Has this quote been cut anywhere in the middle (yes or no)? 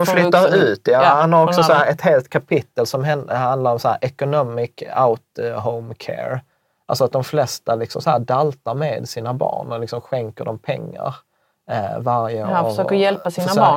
no